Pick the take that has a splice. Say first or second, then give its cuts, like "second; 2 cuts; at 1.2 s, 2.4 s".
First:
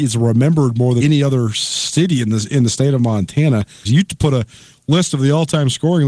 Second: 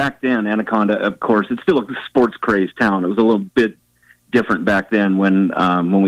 first; 2 cuts; at 1.0 s, 3.9 s